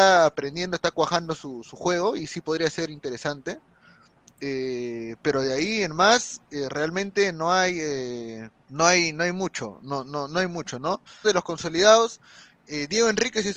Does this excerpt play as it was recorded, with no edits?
no; 2 cuts; at 8.6 s, 11.2 s

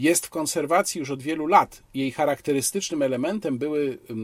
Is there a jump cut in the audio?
no; 0 cuts

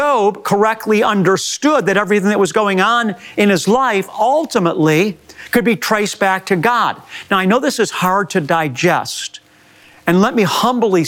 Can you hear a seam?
no; 0 cuts

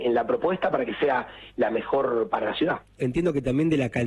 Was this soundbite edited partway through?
yes; 1 cut; at 3.0 s

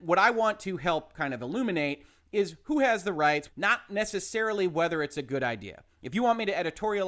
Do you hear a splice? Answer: yes; 1 cut; at 3.5 s

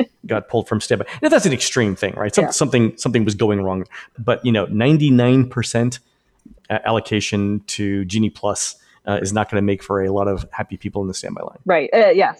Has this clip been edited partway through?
no; 0 cuts

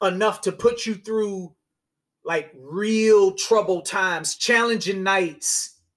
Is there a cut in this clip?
yes; 1 cut; at 4.3 s

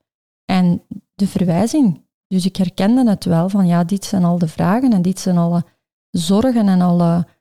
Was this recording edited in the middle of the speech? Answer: no; 0 cuts

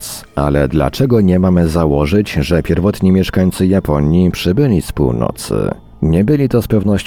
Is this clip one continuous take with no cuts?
yes; 0 cuts

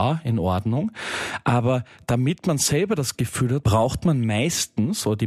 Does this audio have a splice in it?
yes; 1 cut; at 3.6 s

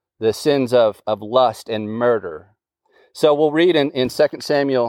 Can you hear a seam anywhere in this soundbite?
no; 0 cuts

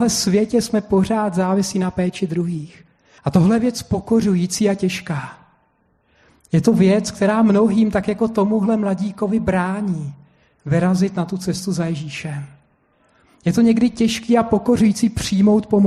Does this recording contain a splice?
yes; 1 cut; at 3.2 s

